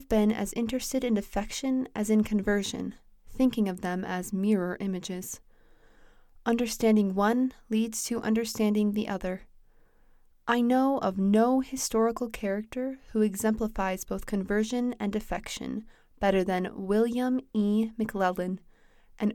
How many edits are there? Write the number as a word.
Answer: zero